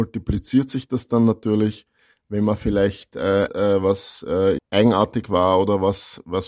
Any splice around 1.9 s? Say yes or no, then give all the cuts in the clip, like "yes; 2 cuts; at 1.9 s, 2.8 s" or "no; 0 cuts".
no; 2 cuts; at 3.5 s, 4.6 s